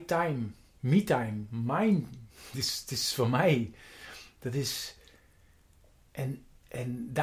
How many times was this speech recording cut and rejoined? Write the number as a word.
zero